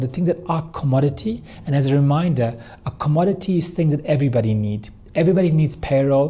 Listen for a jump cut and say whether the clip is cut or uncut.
uncut